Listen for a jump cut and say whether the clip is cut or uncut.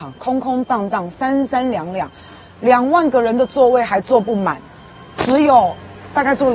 uncut